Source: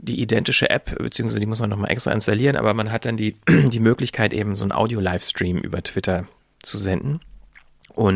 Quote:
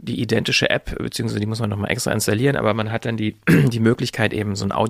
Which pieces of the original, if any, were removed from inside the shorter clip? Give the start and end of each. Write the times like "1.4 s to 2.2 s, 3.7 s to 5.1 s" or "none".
none